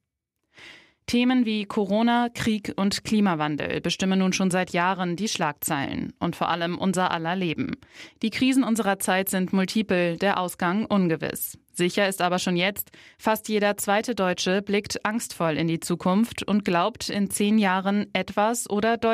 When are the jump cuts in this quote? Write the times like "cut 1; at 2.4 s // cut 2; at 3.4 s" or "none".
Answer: none